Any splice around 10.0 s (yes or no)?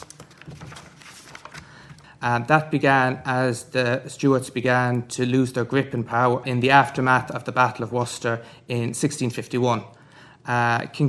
no